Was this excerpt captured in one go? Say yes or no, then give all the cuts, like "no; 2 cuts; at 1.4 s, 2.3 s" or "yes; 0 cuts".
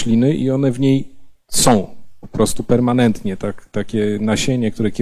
no; 1 cut; at 3.4 s